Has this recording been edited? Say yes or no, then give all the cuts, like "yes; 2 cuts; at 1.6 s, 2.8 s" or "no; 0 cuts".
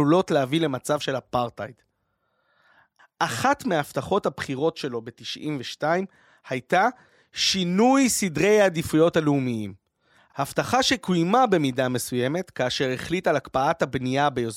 yes; 1 cut; at 3.0 s